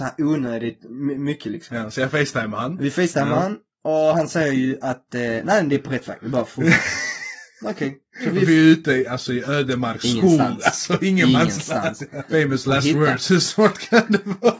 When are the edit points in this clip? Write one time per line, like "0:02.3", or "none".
0:12.3

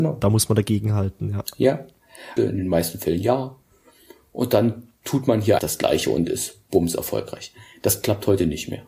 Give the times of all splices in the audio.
0:02.4
0:05.6

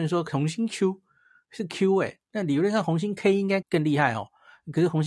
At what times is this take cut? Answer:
0:03.6

